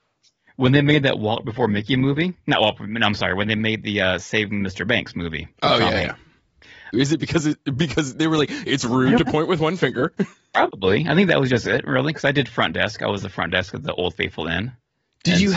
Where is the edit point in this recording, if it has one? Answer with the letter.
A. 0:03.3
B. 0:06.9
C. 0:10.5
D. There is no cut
B